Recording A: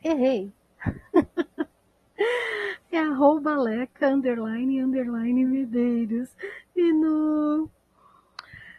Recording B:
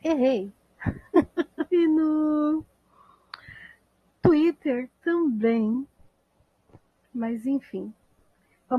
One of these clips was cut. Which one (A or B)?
B